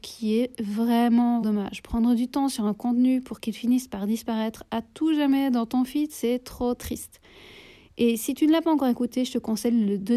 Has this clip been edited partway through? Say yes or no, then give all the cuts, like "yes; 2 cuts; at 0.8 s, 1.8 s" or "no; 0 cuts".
yes; 1 cut; at 1.4 s